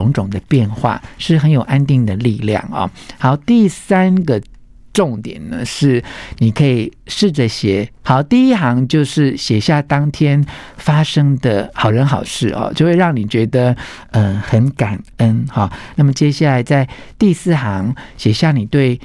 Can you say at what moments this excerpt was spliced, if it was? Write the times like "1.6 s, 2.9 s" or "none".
8.0 s, 15.9 s